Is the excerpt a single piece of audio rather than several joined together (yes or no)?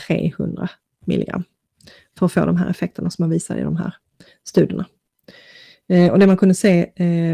yes